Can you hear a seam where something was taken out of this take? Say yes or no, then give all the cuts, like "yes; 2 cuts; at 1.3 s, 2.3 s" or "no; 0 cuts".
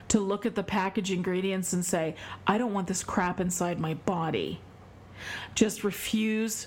no; 0 cuts